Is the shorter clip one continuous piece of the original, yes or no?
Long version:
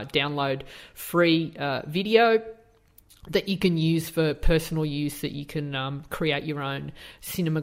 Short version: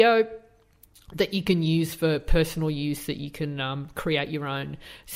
yes